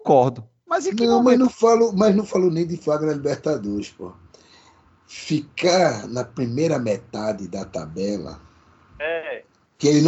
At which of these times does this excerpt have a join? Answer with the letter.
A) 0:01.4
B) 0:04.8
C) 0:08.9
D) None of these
D